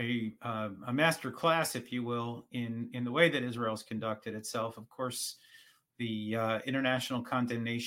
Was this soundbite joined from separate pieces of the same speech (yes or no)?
no